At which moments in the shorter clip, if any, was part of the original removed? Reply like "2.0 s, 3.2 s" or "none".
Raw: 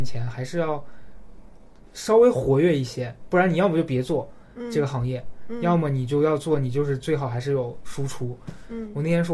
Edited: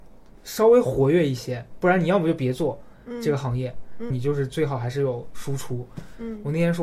4.1 s